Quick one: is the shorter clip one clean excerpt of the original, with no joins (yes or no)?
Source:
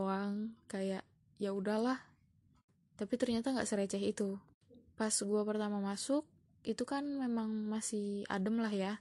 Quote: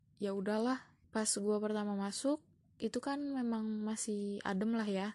no